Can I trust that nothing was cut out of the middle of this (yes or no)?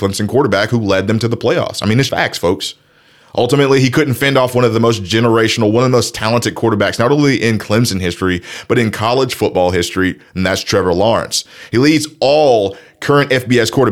no